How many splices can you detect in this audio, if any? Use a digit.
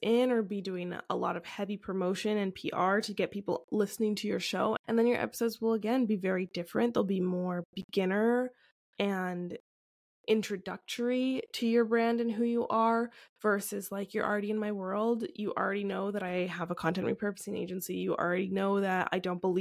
1